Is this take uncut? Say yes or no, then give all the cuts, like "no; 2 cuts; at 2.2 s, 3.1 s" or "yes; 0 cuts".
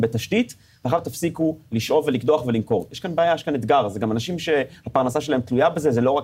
yes; 0 cuts